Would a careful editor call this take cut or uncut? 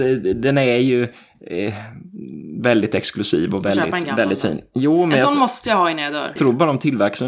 cut